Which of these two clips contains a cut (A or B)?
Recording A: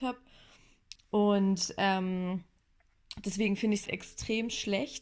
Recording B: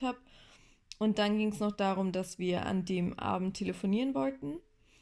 A